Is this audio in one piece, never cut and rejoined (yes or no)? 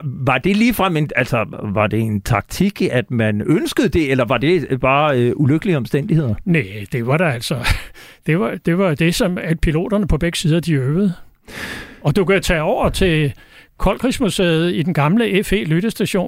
yes